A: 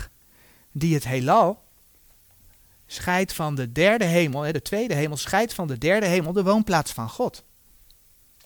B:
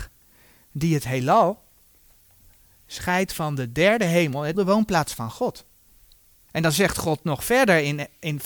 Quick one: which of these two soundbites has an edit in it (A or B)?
B